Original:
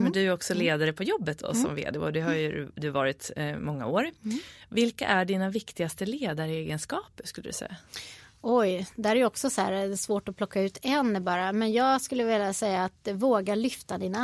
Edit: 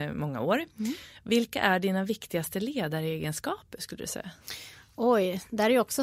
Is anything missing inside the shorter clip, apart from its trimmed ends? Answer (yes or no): no